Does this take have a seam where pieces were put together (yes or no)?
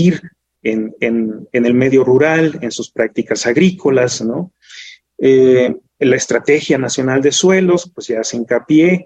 no